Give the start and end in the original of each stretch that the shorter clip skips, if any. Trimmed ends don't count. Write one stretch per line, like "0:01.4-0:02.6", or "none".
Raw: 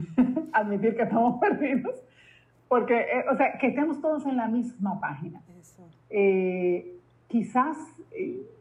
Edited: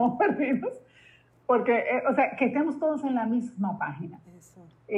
none